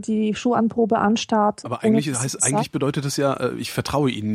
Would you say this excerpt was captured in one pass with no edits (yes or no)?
yes